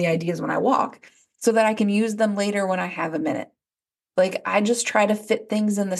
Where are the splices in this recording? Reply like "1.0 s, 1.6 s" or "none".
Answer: none